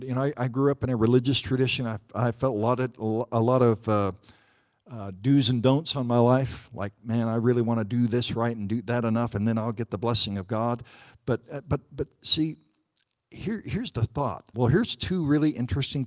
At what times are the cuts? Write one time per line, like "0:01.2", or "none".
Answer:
0:14.5